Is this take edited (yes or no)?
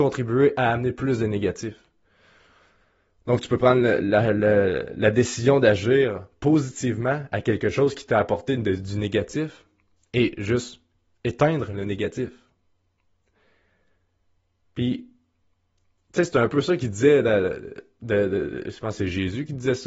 no